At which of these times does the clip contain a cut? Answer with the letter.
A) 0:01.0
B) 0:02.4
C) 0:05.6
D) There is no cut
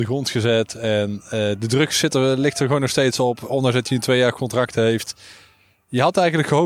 D